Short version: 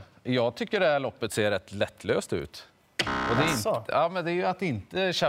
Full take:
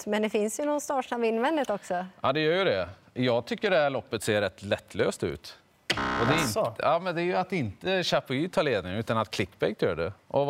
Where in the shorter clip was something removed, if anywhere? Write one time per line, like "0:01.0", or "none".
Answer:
none